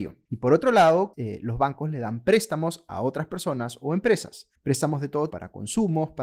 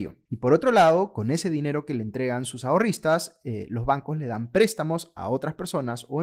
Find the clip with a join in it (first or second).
first